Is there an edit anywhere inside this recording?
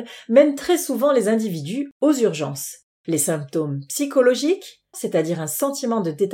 yes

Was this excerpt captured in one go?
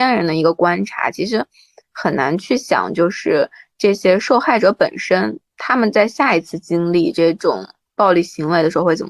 yes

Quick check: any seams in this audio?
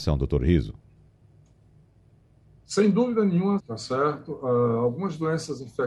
yes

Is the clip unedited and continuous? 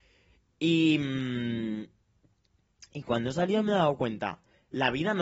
yes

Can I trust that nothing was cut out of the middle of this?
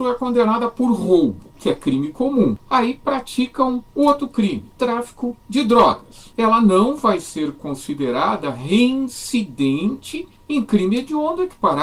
yes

